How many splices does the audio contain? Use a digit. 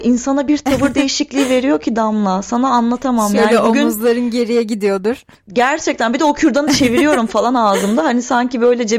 0